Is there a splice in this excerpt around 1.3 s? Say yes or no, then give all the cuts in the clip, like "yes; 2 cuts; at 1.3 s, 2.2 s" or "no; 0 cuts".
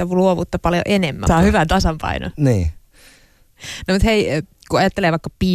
yes; 1 cut; at 1.3 s